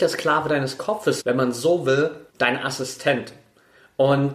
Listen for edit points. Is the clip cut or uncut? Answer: cut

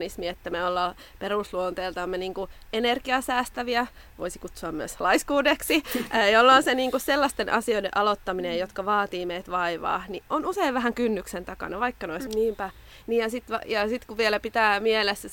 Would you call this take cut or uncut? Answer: cut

